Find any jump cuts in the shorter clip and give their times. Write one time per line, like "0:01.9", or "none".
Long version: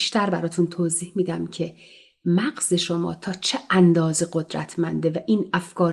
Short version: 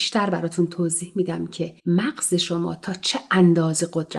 0:01.8